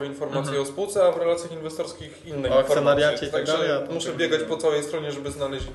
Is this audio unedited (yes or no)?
yes